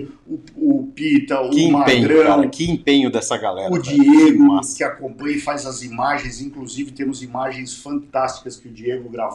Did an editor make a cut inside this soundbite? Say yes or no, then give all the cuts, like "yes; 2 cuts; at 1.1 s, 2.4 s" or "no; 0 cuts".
no; 0 cuts